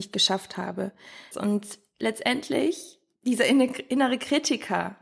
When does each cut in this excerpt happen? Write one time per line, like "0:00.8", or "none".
0:01.3